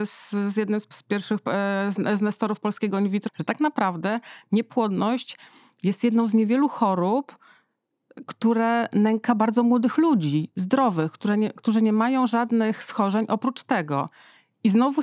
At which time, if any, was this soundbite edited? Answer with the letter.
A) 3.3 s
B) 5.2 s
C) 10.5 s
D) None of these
A